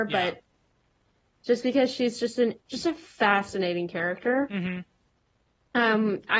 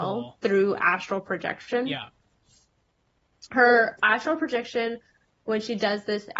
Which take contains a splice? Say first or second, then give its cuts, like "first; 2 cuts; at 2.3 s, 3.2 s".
first; 1 cut; at 2.6 s